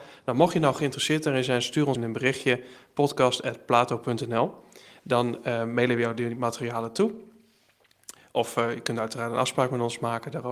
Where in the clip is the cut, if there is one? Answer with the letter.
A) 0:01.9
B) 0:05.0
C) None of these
A